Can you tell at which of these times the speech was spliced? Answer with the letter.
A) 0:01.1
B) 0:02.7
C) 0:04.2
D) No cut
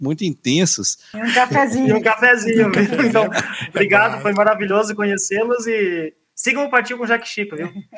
A